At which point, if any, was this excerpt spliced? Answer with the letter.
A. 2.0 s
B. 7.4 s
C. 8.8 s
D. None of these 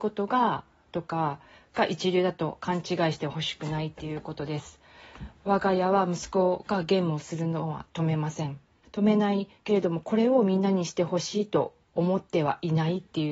C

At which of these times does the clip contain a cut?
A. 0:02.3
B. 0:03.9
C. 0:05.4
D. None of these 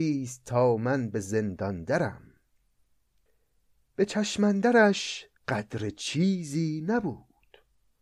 C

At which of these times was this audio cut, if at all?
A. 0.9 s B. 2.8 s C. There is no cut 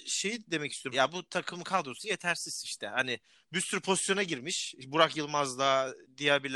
A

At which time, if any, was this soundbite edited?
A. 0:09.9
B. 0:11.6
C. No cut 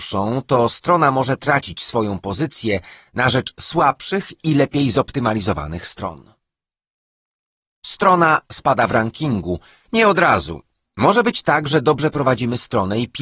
A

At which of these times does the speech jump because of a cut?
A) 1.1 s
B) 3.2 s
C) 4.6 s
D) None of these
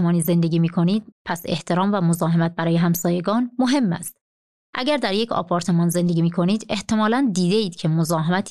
A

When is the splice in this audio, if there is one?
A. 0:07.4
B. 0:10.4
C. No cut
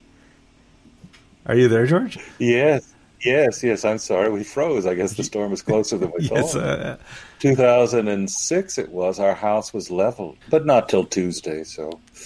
B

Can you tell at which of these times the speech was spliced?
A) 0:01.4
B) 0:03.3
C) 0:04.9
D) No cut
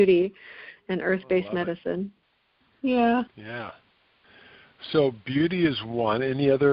B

